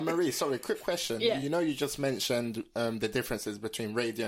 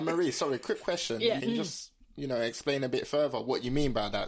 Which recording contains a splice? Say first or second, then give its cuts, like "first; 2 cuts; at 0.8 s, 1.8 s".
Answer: second; 1 cut; at 1.4 s